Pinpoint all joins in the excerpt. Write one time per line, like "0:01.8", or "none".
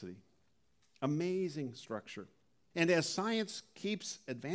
0:02.7

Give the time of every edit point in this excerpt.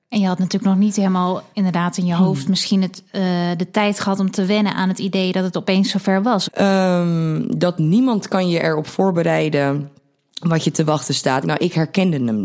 0:06.4
0:11.4

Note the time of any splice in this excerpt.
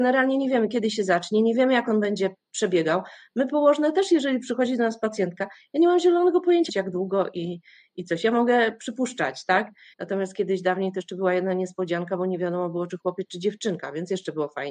0:06.7
0:09.9

